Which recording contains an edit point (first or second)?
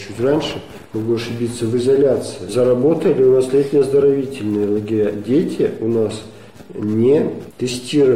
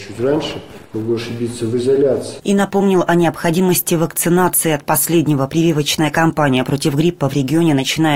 second